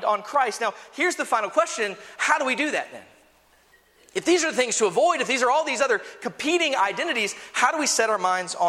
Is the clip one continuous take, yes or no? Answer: yes